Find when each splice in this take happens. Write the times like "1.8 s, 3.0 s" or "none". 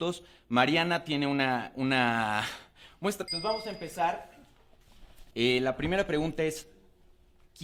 3.3 s, 5.3 s